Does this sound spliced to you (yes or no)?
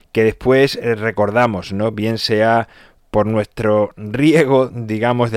no